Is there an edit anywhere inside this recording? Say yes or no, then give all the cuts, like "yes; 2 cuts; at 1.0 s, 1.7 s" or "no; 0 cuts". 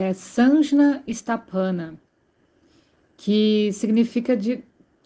no; 0 cuts